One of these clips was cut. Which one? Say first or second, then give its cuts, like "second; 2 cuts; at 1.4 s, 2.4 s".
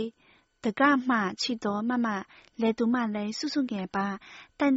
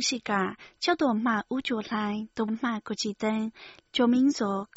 second; 2 cuts; at 2.5 s, 3.8 s